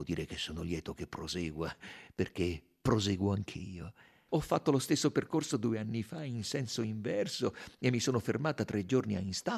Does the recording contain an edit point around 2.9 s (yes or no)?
no